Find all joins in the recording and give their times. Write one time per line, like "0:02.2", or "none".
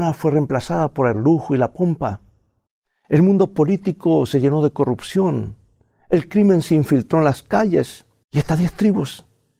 0:08.3